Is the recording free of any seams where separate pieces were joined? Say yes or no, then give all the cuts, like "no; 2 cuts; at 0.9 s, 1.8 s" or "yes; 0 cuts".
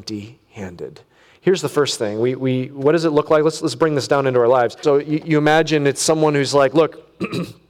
no; 1 cut; at 4.8 s